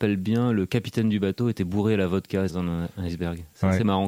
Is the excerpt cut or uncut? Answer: cut